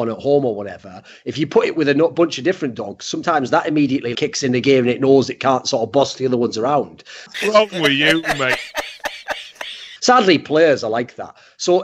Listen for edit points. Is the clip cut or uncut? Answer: cut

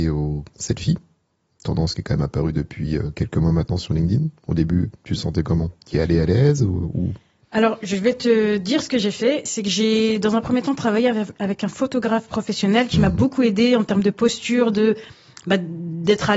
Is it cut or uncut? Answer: uncut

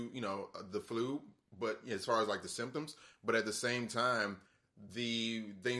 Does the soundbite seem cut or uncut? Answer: uncut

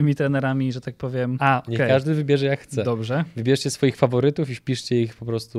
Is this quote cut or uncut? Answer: cut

